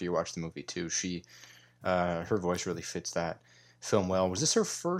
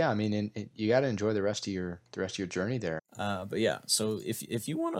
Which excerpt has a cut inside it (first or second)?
second